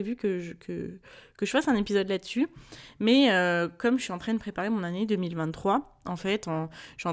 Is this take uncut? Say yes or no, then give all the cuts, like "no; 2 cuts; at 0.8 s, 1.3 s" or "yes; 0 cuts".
yes; 0 cuts